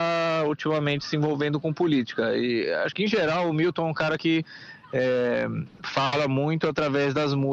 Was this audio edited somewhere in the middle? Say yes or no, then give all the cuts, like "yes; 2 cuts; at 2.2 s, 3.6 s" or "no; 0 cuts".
no; 0 cuts